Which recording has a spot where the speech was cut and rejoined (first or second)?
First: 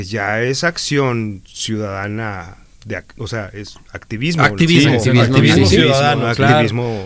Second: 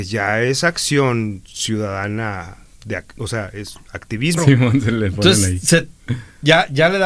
second